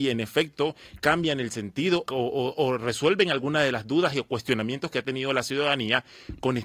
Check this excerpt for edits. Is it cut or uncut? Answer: cut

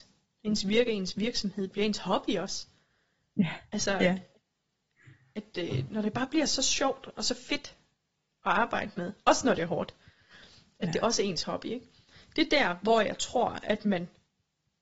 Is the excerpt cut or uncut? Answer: uncut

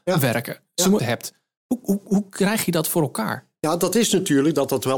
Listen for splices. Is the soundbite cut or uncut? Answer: cut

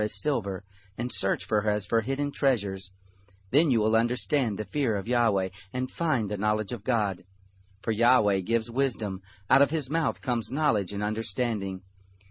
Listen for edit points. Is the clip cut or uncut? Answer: uncut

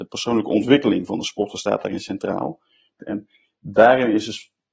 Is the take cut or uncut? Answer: cut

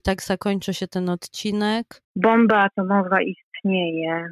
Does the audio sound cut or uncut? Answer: cut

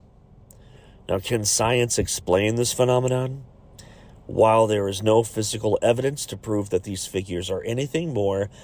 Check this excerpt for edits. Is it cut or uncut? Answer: uncut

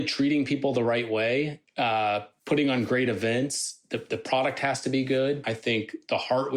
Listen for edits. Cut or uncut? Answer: cut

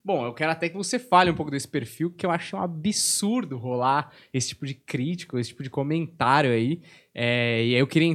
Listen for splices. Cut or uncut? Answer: uncut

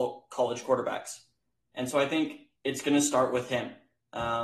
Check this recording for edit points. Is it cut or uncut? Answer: cut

